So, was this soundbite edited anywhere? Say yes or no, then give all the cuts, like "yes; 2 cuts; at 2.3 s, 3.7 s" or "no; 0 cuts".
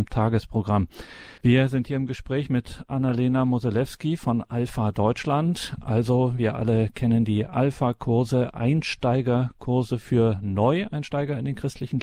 yes; 1 cut; at 1.4 s